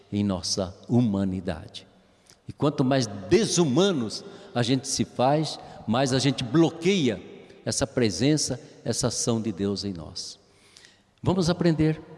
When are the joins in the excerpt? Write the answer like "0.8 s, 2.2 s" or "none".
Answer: none